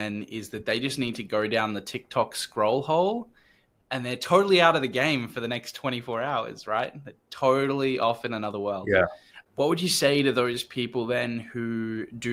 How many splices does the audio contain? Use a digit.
0